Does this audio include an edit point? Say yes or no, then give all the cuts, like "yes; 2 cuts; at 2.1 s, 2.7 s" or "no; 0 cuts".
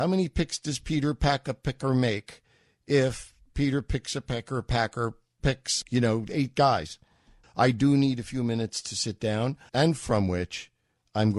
yes; 3 cuts; at 5.8 s, 7.4 s, 9.7 s